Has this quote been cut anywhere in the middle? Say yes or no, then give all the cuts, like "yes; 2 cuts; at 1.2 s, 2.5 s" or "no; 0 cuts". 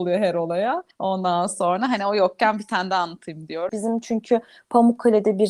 yes; 2 cuts; at 0.9 s, 3.7 s